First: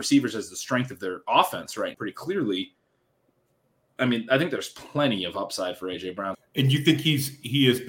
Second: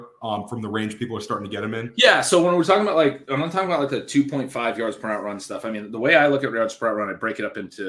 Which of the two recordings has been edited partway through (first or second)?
first